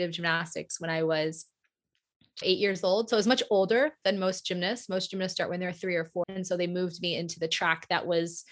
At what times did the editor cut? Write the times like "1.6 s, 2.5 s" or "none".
2.4 s, 6.2 s